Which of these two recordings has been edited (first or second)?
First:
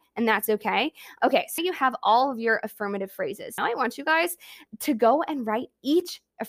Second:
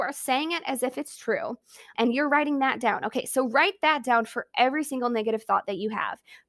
first